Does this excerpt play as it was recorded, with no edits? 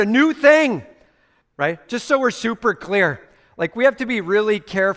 no; 1 cut; at 1.4 s

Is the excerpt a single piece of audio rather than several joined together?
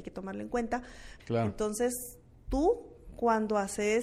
no; 1 cut; at 1.2 s

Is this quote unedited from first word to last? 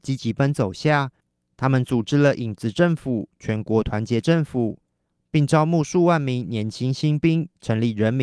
yes; 0 cuts

